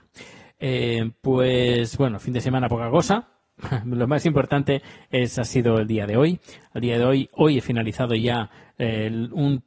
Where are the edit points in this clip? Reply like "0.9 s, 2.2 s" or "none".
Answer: none